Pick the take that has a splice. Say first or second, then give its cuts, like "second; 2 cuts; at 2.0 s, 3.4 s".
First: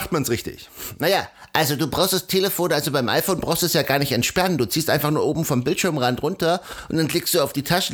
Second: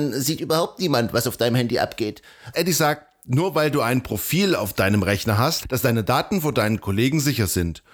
second; 2 cuts; at 2.5 s, 5.6 s